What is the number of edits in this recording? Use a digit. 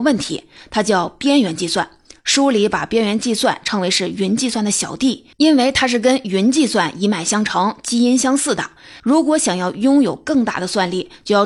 2